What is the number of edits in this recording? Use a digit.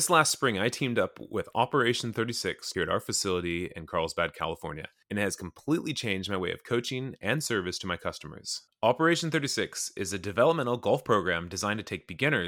0